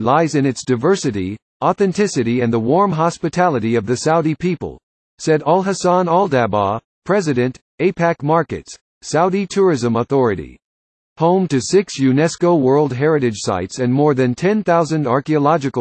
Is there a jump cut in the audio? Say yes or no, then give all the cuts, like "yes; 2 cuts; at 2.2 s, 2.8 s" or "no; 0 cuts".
yes; 1 cut; at 11.1 s